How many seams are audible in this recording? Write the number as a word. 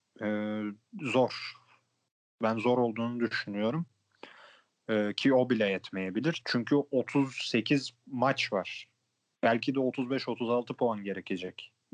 zero